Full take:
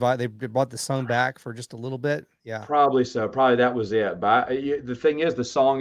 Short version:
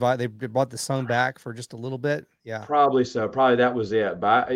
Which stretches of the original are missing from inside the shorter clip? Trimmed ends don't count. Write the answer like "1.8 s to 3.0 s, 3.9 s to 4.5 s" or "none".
none